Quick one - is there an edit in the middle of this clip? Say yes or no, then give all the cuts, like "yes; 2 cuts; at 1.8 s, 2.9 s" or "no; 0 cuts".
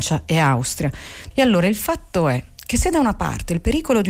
yes; 1 cut; at 1.3 s